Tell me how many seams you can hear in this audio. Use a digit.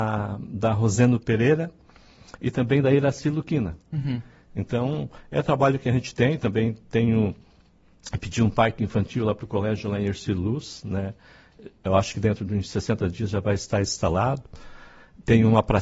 1